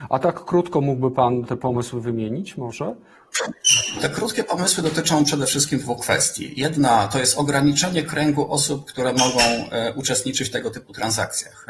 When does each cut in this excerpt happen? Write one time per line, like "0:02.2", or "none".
0:01.5